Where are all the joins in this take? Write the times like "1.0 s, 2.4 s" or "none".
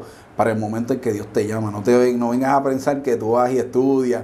none